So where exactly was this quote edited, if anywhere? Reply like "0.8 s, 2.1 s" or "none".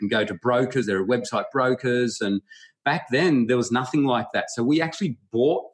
none